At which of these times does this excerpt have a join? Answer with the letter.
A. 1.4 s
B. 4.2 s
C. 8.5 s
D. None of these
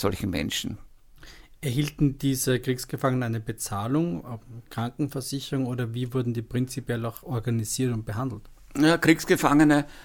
D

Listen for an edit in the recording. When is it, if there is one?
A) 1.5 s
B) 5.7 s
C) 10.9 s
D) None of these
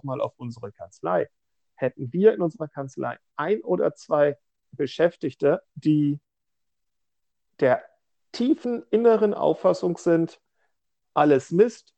B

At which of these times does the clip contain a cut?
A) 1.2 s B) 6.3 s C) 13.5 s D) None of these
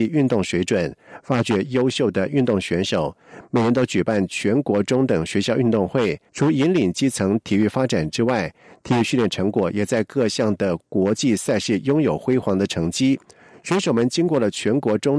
B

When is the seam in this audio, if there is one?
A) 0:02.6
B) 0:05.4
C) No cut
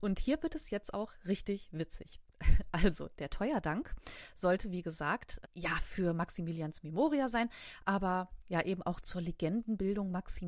B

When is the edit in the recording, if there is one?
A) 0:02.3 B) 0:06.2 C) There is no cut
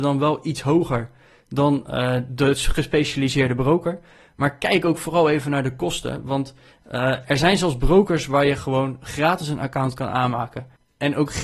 A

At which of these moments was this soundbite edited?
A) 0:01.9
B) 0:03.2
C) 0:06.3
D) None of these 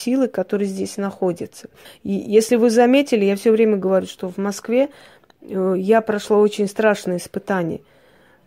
A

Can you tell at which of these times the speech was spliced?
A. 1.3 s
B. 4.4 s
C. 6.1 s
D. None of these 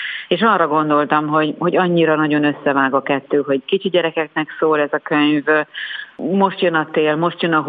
D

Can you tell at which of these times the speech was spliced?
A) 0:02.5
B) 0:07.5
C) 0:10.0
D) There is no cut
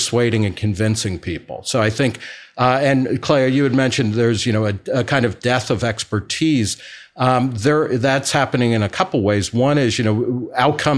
D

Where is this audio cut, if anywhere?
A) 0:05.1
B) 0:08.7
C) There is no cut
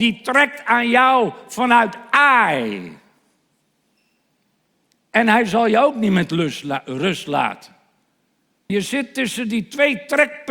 B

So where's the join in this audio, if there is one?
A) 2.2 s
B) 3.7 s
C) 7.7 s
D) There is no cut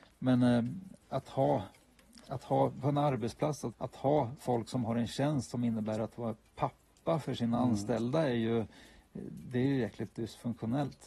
B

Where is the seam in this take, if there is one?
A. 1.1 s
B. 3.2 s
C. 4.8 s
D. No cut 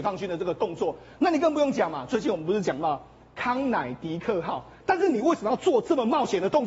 C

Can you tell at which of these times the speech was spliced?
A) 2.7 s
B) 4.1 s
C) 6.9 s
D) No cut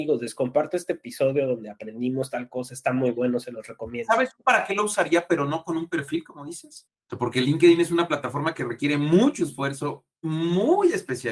C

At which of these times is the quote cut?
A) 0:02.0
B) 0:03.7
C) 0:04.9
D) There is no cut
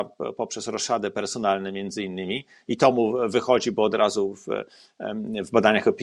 D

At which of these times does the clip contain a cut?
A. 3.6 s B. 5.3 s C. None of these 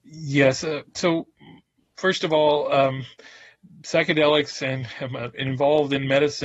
B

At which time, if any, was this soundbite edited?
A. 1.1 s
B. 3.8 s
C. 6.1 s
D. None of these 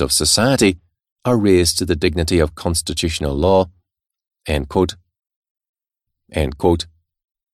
C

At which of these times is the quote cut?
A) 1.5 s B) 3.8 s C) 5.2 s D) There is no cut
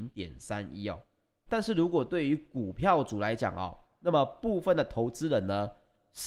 A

